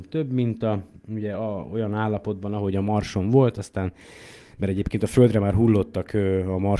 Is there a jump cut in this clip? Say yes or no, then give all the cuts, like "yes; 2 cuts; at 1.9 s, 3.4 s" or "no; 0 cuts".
no; 0 cuts